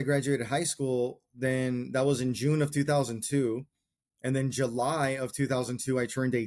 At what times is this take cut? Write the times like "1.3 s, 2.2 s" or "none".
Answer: none